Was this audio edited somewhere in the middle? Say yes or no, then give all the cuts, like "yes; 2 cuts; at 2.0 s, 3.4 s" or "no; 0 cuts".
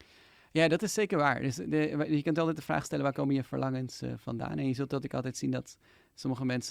no; 0 cuts